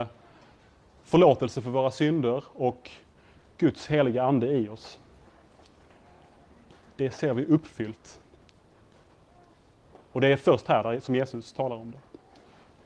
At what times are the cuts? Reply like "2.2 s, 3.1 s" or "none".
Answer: none

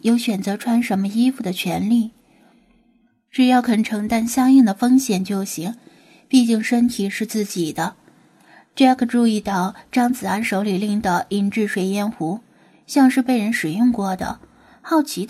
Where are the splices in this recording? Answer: none

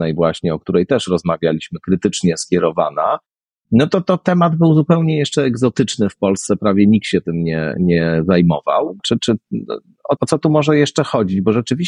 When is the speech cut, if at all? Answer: 9.0 s, 10.2 s

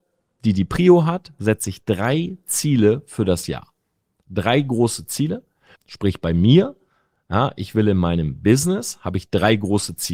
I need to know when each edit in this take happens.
5.8 s

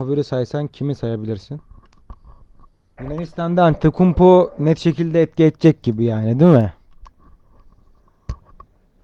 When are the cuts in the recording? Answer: 3.0 s

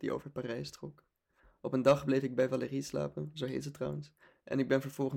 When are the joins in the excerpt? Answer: none

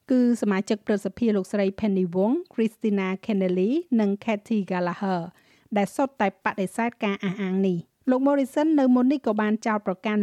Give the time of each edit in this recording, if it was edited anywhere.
8.0 s

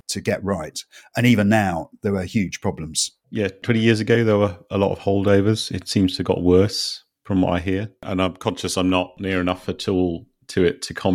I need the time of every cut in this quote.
none

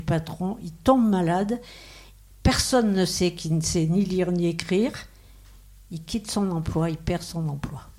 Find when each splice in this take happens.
none

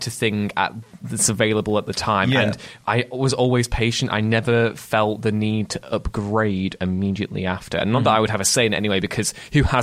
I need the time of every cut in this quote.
none

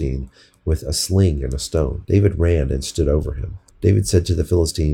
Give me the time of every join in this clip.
2.0 s, 3.7 s

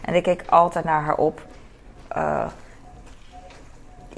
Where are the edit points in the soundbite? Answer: 2.1 s

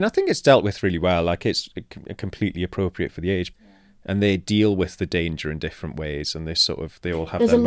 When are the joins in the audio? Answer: 3.5 s

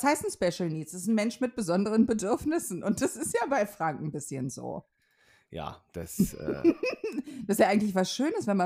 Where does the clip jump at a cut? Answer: none

